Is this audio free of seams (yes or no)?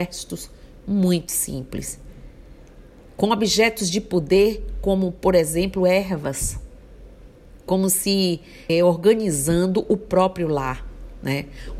no